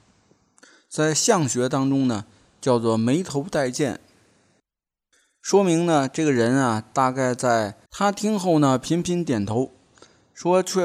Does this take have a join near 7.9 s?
yes; 1 cut; at 7.9 s

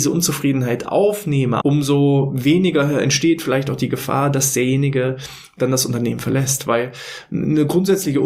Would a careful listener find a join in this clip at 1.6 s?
yes; 1 cut; at 1.6 s

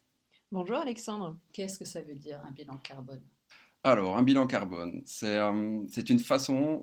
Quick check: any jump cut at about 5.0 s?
no; 1 cut; at 1.5 s

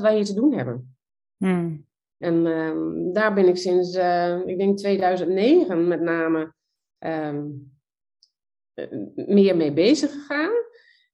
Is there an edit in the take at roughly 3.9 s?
no; 1 cut; at 2.2 s

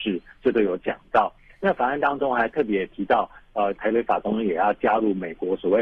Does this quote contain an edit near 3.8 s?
yes; 1 cut; at 3.8 s

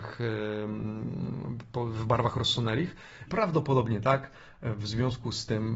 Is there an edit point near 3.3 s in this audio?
yes; 1 cut; at 3.3 s

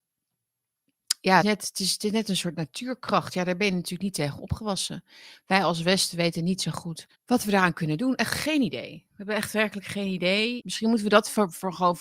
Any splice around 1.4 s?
yes; 3 cuts; at 1.4 s, 7.1 s, 10.6 s

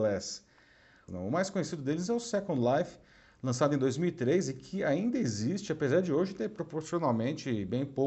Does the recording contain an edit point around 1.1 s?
yes; 1 cut; at 1.1 s

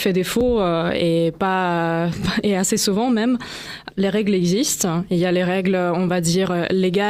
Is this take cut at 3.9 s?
yes; 1 cut; at 3.9 s

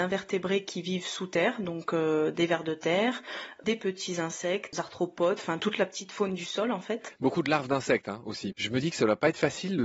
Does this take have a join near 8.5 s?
yes; 2 cuts; at 4.7 s, 8.5 s

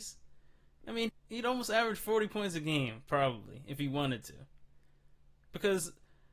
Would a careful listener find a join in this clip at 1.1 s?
yes; 1 cut; at 1.1 s

